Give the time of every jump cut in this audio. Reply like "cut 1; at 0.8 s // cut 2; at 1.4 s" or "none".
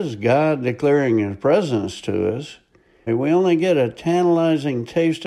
cut 1; at 3.1 s